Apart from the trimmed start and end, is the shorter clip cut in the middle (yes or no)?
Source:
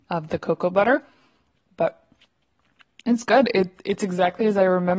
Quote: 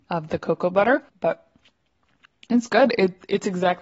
yes